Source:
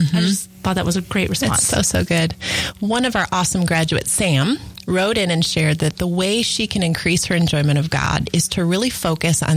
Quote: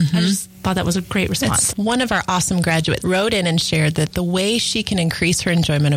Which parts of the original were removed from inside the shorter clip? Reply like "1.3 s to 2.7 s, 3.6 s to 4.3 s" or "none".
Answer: 1.7 s to 2.7 s, 4.0 s to 4.8 s